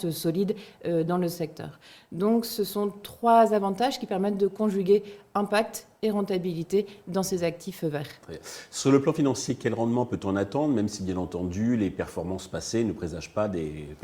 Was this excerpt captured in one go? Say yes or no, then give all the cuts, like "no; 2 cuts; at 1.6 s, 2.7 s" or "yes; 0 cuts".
yes; 0 cuts